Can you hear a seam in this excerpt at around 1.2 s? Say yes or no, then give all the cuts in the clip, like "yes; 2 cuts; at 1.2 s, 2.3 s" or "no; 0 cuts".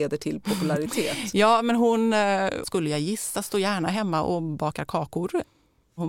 no; 1 cut; at 2.6 s